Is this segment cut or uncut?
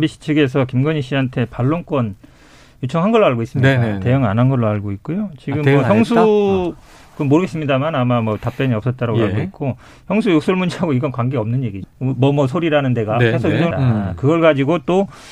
cut